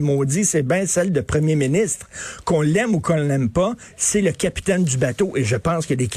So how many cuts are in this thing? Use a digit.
0